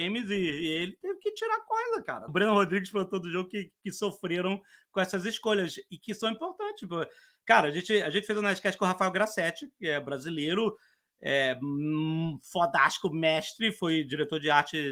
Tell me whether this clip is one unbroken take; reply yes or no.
no